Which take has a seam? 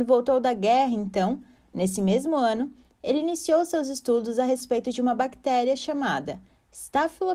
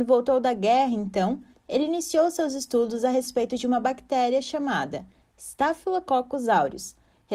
second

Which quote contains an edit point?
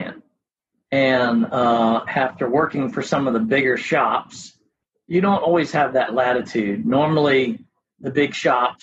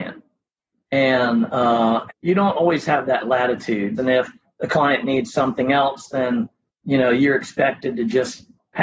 second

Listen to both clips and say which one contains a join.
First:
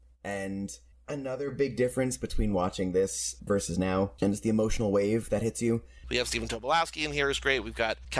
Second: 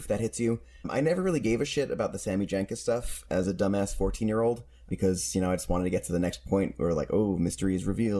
first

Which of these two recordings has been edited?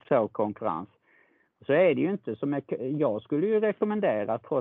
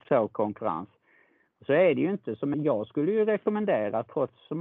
second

